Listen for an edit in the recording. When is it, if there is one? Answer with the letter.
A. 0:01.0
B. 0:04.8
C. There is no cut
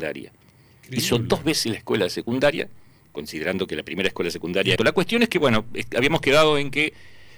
B